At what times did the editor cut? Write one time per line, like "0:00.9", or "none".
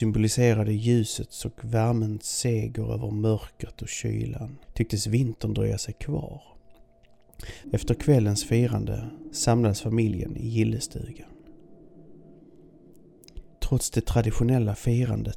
0:04.6
0:07.6
0:13.5